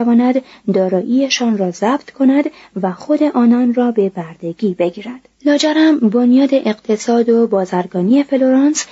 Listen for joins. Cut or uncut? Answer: cut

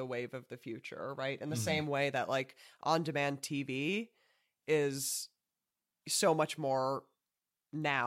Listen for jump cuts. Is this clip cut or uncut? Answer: uncut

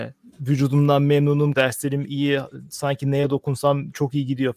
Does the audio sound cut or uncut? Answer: cut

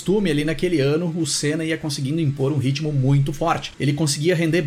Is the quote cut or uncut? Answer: uncut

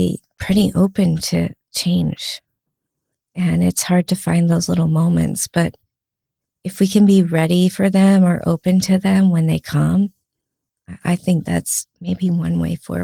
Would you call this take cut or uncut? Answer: uncut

